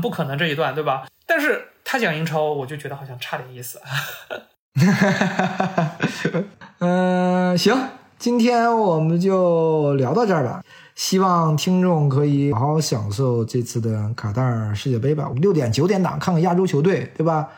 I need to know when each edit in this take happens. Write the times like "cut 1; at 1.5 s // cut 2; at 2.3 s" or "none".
cut 1; at 12.5 s // cut 2; at 15.3 s